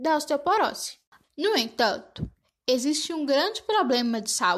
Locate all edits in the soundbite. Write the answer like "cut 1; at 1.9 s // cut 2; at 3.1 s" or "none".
cut 1; at 1.2 s